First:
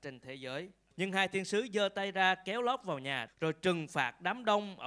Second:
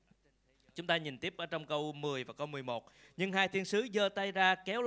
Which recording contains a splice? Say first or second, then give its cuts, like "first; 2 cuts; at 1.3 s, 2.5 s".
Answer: first; 2 cuts; at 0.9 s, 3.3 s